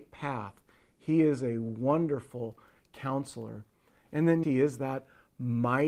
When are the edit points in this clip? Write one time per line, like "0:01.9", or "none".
0:04.4